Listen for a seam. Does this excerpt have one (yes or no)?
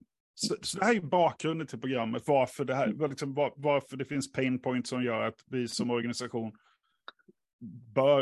no